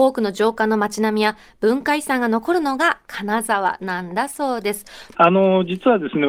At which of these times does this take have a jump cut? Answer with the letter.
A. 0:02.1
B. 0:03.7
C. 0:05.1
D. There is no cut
C